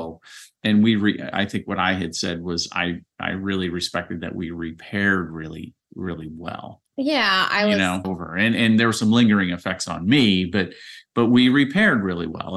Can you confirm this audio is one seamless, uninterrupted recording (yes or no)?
no